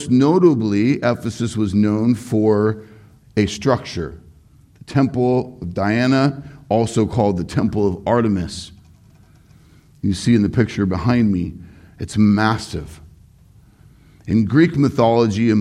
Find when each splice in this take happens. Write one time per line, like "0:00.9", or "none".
none